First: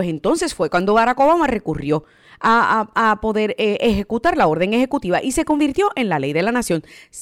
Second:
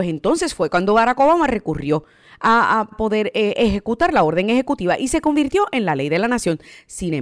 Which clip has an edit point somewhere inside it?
second; 1 cut; at 2.9 s

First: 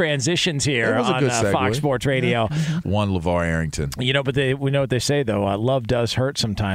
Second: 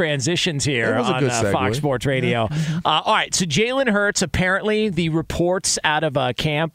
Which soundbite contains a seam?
first; 1 cut; at 2.8 s

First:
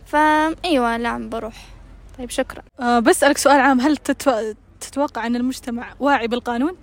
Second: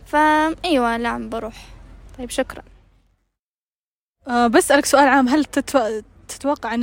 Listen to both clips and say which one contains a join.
first; 1 cut; at 2.7 s

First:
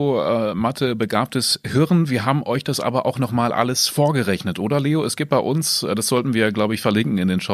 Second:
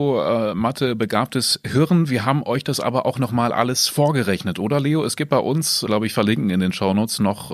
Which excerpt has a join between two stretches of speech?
second; 1 cut; at 5.9 s

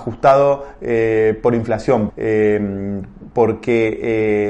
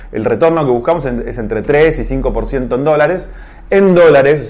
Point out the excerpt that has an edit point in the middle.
first; 1 cut; at 2.1 s

